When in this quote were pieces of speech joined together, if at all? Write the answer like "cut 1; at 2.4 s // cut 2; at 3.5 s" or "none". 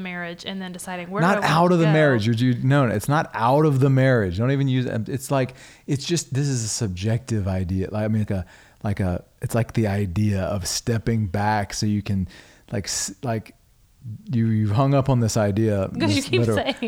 cut 1; at 8.3 s